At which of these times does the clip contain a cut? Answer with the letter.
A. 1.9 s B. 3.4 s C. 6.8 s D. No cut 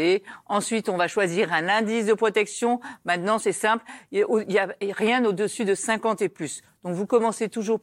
D